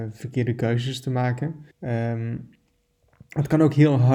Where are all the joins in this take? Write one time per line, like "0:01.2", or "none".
0:01.7